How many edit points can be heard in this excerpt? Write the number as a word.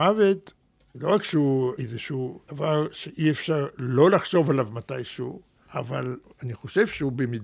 zero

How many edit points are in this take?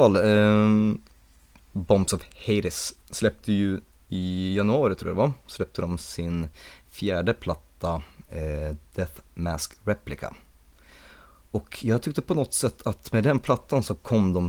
zero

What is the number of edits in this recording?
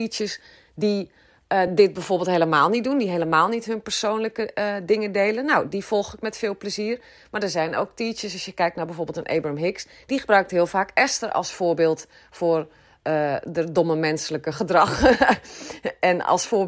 zero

